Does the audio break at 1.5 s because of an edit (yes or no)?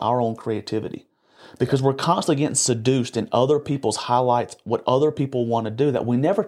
no